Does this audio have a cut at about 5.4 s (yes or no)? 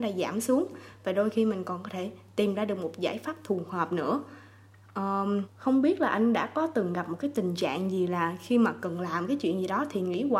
yes